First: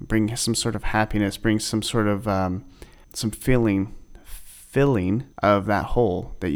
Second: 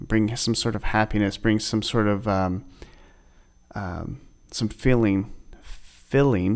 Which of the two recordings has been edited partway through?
first; 2 cuts; at 3.0 s, 5.3 s

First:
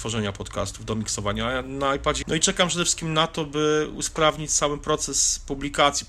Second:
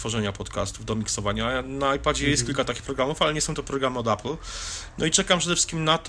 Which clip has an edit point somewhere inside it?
first; 1 cut; at 2.2 s

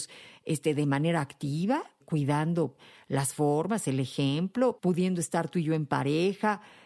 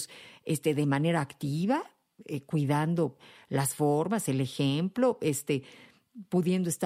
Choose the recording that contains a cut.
first; 2 cuts; at 2.0 s, 4.8 s

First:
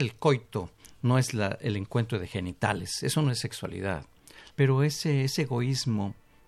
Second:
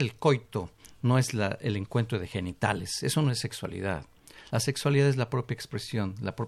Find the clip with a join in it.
first; 1 cut; at 4.5 s

